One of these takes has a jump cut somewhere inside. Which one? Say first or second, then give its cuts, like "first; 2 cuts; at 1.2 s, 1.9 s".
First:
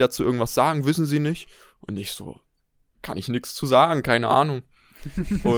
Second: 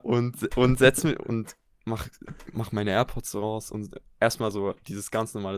first; 1 cut; at 2.9 s